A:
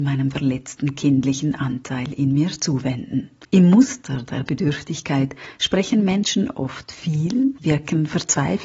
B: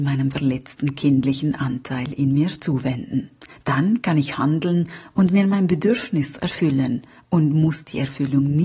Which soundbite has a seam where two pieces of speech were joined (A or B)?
A